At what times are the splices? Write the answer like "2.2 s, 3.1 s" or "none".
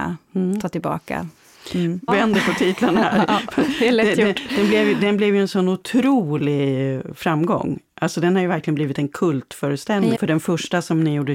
2.1 s, 10.1 s